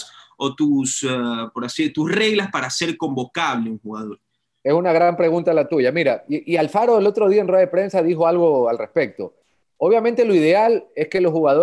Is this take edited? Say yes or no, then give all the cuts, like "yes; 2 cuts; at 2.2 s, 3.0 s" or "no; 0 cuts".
no; 0 cuts